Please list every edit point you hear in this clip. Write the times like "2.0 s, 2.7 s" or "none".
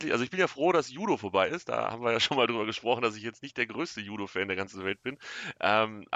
none